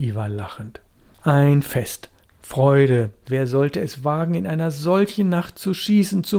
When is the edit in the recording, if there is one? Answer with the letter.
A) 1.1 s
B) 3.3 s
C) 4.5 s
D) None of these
B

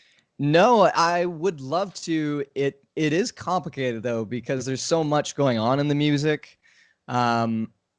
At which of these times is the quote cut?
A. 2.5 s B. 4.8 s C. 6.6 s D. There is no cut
D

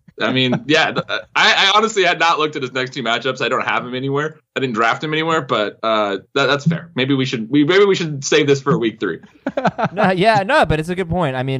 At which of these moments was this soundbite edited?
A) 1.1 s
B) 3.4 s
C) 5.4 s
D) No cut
D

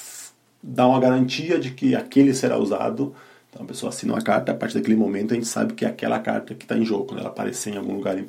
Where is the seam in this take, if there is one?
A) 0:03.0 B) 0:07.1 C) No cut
C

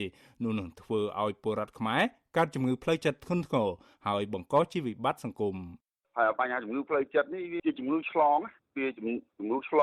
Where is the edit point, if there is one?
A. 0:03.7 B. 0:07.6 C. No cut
B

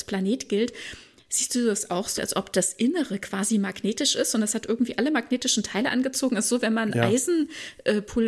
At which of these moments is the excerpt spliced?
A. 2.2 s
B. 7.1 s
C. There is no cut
A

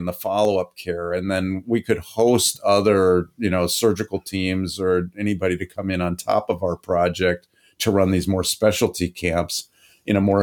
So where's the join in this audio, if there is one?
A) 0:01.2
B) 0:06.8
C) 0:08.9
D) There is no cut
D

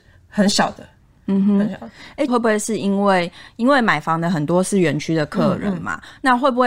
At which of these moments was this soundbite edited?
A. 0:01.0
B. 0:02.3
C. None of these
B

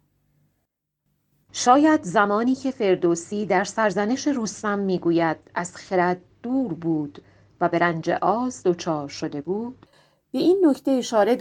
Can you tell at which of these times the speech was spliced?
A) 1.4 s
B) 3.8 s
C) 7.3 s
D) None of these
A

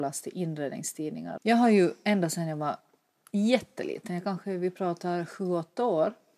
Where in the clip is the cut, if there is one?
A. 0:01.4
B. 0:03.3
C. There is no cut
A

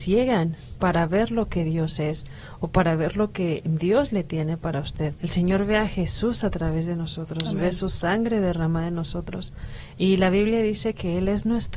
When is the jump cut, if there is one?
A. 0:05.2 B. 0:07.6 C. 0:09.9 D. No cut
A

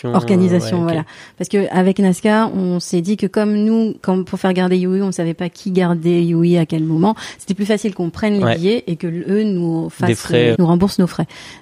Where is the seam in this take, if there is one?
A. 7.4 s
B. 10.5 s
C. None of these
B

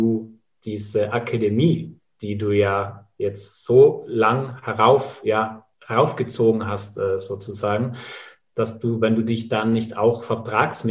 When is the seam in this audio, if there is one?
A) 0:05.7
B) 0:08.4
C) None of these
A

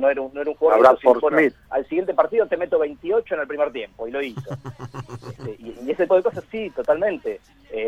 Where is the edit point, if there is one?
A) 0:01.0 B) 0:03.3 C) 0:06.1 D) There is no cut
C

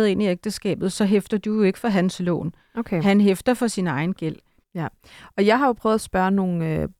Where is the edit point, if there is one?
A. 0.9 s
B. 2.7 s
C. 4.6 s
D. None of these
C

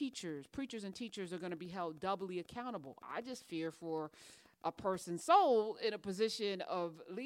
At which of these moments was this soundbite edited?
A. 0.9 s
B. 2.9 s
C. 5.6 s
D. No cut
D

